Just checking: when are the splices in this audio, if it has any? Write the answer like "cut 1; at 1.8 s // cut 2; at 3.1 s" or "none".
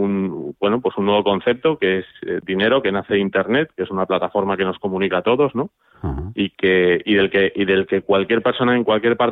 none